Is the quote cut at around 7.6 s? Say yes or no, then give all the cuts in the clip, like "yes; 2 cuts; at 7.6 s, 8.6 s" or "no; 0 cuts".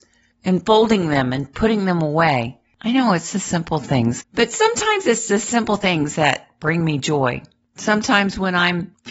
yes; 2 cuts; at 4.2 s, 7.6 s